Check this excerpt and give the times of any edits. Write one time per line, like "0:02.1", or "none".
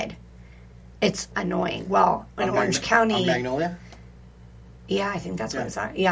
0:01.3